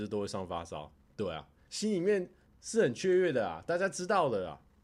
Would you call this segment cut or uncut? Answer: cut